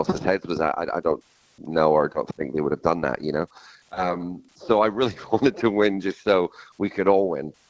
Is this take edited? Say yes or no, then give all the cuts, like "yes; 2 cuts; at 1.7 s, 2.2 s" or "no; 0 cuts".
no; 0 cuts